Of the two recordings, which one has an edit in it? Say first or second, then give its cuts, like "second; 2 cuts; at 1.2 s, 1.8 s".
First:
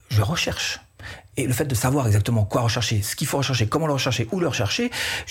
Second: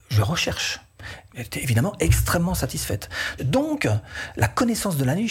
second; 2 cuts; at 1.3 s, 3.4 s